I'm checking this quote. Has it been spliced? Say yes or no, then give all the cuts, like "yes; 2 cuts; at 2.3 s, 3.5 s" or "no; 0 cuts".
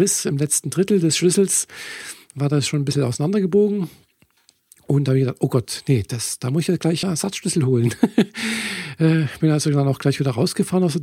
yes; 1 cut; at 7.0 s